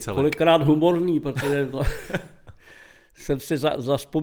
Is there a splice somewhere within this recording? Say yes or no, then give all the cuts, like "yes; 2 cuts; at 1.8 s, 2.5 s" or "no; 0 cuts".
no; 0 cuts